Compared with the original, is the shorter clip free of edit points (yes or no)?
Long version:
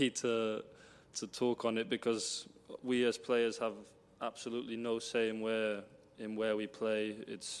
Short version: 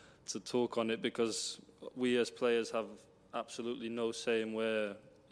yes